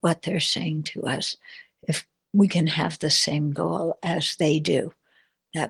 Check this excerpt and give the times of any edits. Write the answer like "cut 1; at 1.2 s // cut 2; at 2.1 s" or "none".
none